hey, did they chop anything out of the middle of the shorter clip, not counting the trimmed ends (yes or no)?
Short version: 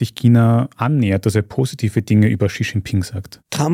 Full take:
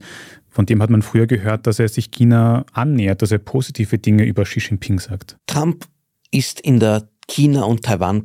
no